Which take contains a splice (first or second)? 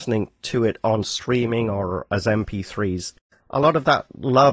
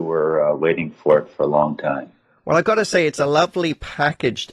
first